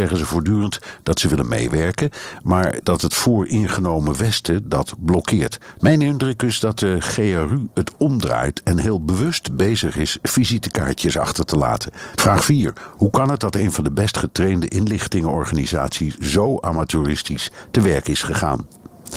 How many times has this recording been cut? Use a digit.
2